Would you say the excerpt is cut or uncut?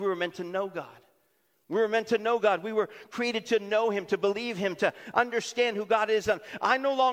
uncut